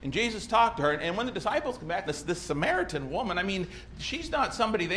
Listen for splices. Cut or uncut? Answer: cut